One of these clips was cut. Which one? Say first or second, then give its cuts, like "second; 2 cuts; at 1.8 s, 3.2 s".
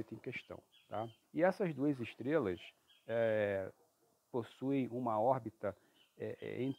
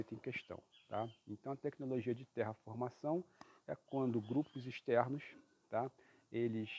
first; 1 cut; at 1.2 s